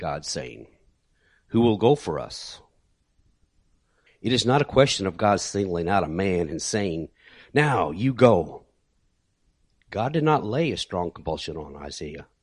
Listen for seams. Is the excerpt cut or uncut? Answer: cut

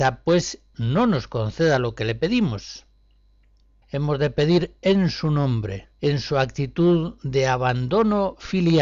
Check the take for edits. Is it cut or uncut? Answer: cut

